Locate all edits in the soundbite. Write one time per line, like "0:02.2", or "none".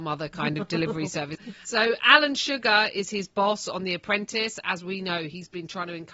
0:01.3